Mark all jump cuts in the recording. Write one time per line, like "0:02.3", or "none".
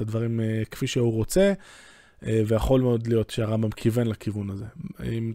none